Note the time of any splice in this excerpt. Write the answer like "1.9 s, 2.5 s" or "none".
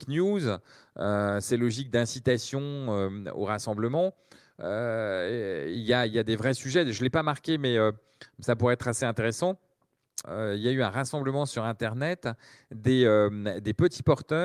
10.2 s